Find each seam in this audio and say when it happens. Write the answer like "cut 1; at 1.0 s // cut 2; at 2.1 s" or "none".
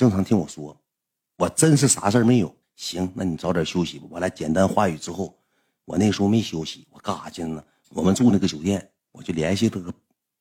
cut 1; at 2.6 s // cut 2; at 7.8 s